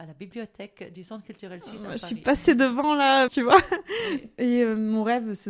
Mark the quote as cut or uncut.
cut